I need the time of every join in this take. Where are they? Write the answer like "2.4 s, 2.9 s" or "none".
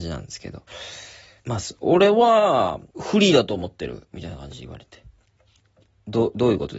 1.4 s, 2.9 s